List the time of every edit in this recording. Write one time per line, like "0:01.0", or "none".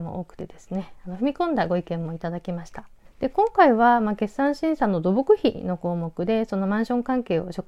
0:03.1